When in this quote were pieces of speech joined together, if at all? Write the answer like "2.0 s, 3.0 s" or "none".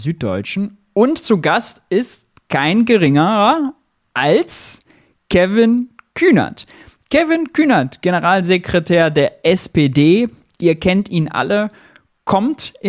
none

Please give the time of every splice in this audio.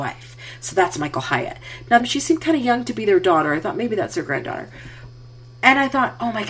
2.0 s

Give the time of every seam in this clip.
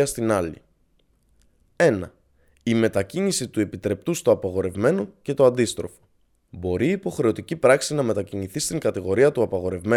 6.5 s

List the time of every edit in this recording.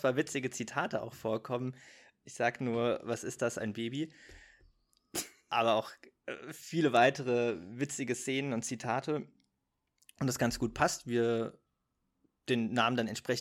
none

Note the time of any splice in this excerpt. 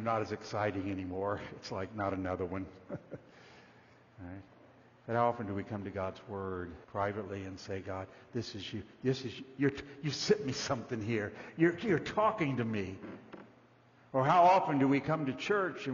6.8 s

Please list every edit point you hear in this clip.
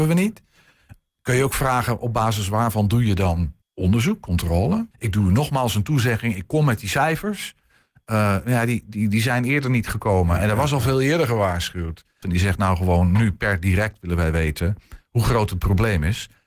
3.6 s, 4.9 s, 12.2 s

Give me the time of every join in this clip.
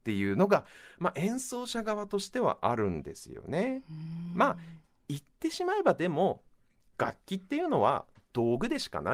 none

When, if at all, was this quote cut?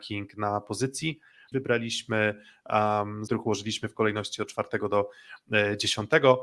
1.5 s, 3.3 s

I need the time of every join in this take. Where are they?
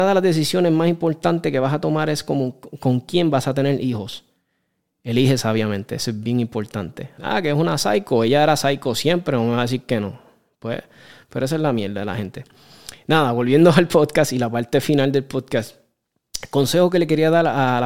7.2 s

